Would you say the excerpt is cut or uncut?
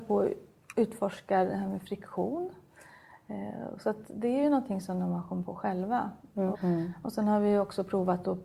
cut